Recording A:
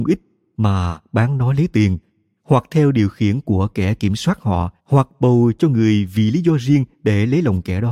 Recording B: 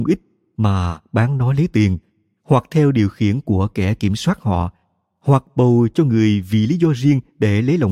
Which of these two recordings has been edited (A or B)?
A